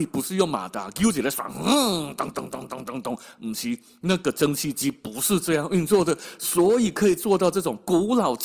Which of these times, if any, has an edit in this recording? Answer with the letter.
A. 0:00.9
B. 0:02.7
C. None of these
B